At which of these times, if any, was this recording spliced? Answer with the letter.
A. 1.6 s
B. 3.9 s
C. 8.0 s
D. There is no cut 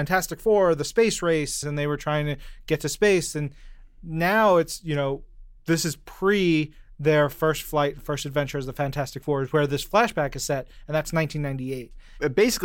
A